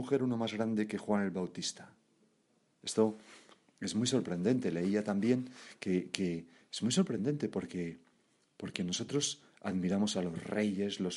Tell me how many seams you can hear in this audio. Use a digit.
0